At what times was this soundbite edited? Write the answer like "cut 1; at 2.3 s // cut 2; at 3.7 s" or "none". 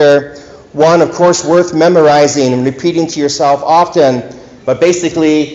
cut 1; at 4.6 s